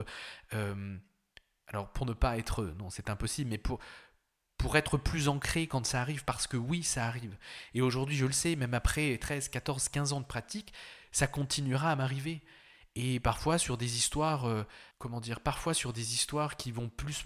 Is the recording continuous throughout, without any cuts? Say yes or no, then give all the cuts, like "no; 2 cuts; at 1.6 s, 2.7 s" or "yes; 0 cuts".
no; 1 cut; at 14.9 s